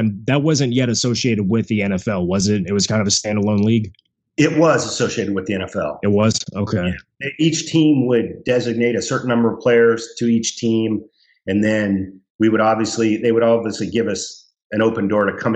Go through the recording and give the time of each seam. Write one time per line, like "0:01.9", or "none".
none

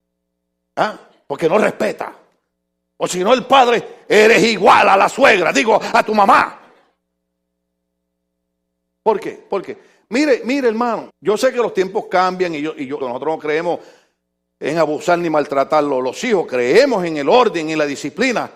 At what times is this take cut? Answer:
0:11.1
0:13.0

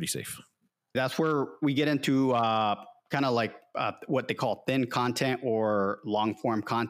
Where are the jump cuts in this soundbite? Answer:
0:00.9

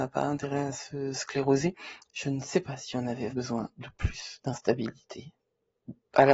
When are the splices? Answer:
0:02.0
0:03.3

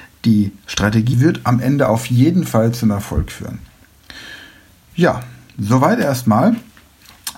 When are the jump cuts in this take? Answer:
0:01.1

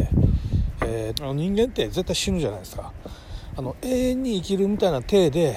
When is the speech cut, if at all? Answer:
0:01.1

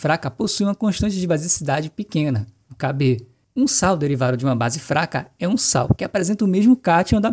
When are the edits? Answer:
none

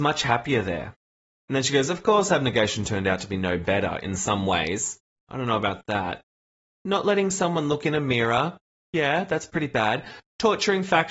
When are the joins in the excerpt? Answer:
0:05.2

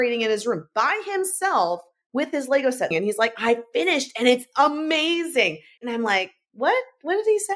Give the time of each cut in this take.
0:02.9
0:05.8

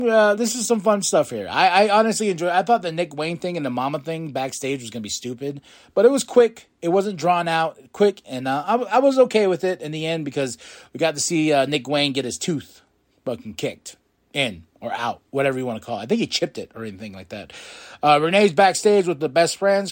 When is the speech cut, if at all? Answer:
0:08.2

